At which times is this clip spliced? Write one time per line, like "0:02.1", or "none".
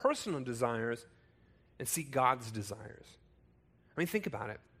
none